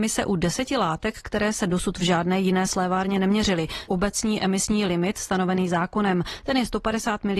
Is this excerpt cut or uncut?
cut